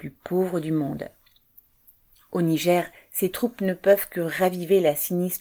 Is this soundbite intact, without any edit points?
yes; 0 cuts

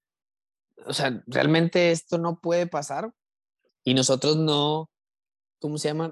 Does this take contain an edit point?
yes; 1 cut; at 3.7 s

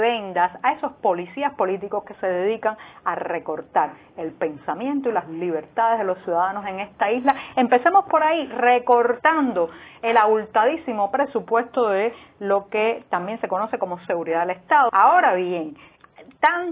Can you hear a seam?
yes; 1 cut; at 14.9 s

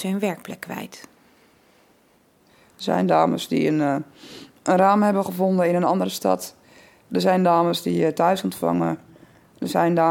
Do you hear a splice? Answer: no; 0 cuts

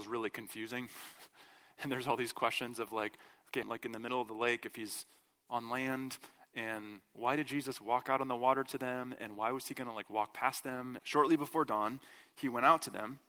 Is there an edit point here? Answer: yes; 2 cuts; at 3.6 s, 11.0 s

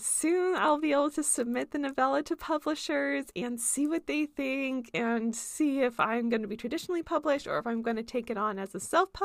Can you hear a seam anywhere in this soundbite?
no; 0 cuts

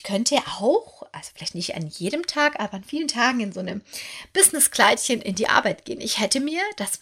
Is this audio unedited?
yes; 0 cuts

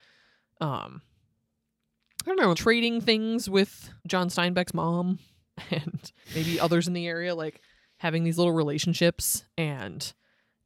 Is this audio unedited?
no; 3 cuts; at 2.5 s, 4.0 s, 6.2 s

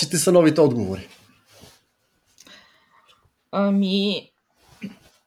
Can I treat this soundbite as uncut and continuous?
yes; 0 cuts

